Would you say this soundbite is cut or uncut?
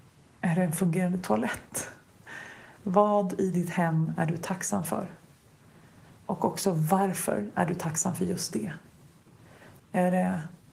cut